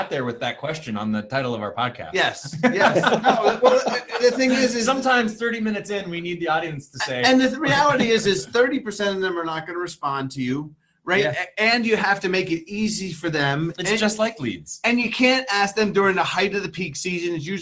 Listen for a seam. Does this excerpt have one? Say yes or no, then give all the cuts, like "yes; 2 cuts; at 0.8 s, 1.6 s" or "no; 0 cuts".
no; 0 cuts